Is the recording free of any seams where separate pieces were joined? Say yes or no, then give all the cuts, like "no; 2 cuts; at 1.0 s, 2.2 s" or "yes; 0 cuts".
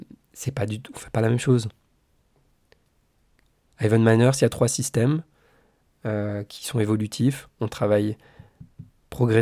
yes; 0 cuts